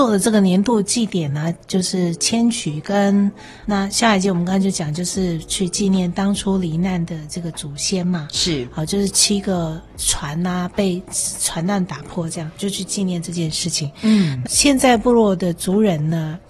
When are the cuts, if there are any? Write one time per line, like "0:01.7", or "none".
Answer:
0:01.6
0:03.6
0:14.4